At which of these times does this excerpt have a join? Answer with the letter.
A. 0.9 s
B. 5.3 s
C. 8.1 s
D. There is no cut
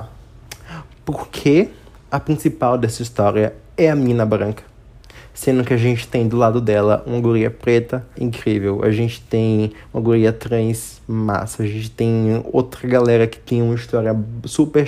C